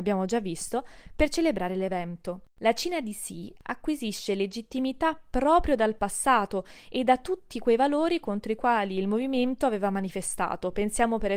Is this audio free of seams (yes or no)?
yes